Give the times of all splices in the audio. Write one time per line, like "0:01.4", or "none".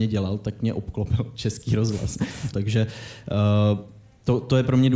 0:02.5